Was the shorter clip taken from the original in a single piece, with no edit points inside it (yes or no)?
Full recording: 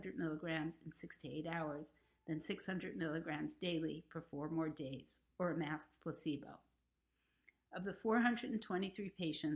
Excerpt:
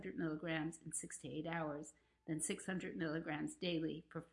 yes